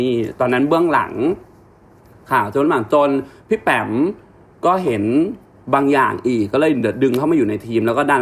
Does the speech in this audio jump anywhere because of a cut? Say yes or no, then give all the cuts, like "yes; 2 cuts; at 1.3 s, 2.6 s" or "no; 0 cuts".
no; 0 cuts